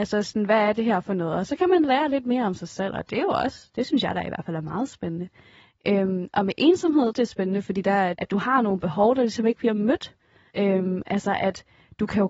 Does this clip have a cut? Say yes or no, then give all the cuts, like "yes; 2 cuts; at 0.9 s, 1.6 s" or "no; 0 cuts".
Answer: yes; 3 cuts; at 7.1 s, 8.1 s, 10.5 s